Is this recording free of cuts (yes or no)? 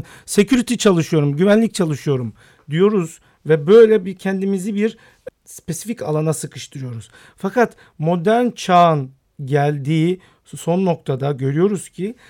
no